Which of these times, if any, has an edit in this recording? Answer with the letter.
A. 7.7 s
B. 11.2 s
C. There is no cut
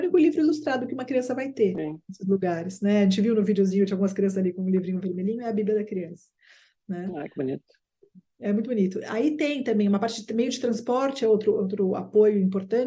C